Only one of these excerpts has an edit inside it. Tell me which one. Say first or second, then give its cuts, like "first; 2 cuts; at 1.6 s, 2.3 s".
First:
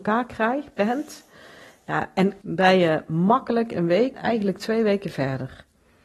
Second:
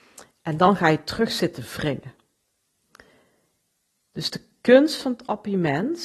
first; 2 cuts; at 2.4 s, 4.1 s